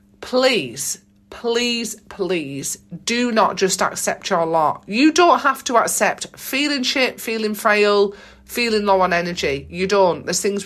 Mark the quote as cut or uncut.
uncut